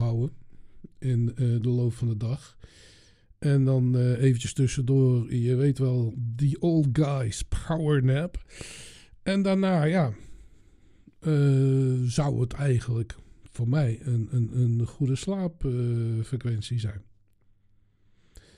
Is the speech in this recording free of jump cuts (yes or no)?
yes